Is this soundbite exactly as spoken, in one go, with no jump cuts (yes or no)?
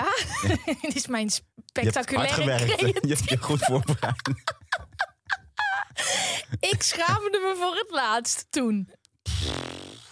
yes